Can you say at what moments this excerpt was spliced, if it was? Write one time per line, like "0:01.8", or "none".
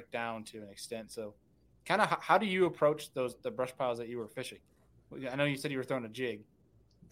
none